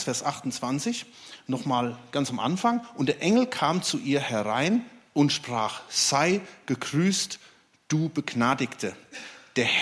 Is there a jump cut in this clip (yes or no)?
no